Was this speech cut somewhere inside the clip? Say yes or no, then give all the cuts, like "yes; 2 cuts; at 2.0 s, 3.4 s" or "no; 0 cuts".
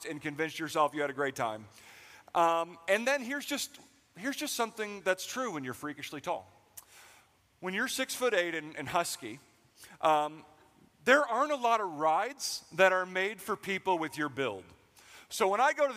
no; 0 cuts